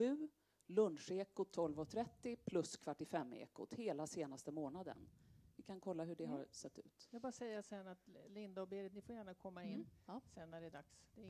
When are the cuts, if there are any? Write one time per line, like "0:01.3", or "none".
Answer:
none